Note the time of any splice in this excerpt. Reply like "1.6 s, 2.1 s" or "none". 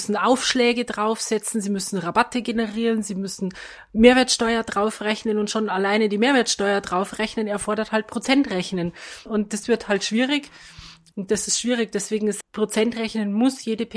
9.3 s, 11.1 s, 12.4 s